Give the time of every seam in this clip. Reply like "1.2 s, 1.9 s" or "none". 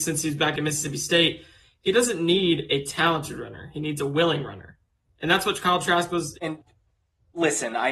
6.3 s